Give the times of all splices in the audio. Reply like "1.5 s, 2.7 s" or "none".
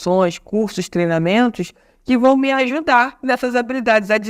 none